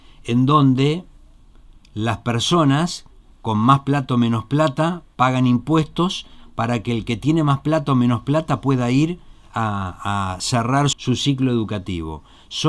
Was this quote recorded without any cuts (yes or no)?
no